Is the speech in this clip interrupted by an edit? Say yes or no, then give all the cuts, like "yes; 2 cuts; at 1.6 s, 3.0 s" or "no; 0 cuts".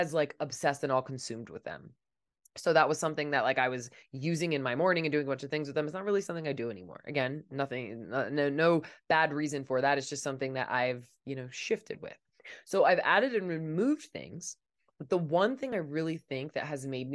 no; 0 cuts